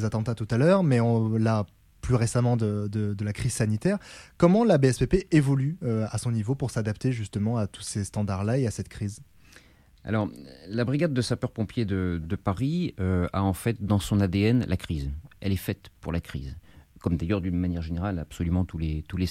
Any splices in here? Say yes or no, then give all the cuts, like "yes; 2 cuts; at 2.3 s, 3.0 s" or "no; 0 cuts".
no; 0 cuts